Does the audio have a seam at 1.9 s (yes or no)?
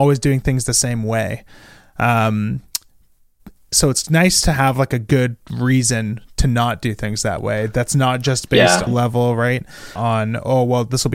no